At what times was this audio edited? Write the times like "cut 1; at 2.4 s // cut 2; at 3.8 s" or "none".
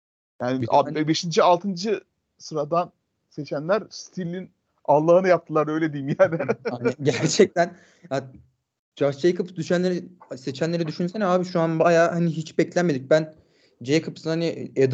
none